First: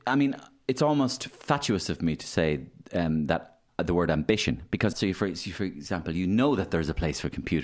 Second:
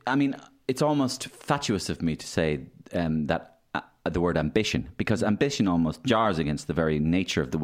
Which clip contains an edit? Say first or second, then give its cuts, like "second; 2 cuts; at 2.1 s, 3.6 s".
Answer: first; 2 cuts; at 3.7 s, 4.9 s